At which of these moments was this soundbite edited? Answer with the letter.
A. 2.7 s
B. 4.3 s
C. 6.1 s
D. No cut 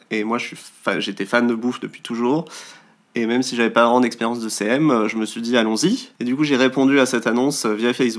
C